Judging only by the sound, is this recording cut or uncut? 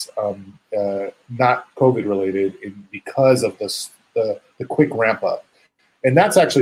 uncut